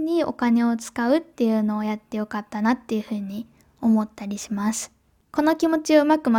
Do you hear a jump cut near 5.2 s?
yes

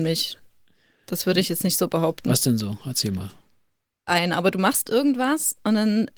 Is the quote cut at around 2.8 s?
no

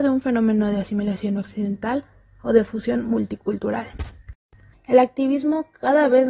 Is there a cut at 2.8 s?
no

